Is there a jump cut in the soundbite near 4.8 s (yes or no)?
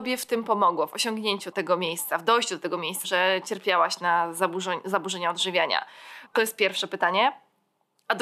no